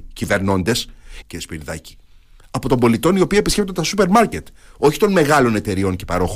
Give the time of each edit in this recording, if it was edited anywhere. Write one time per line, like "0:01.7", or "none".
0:01.2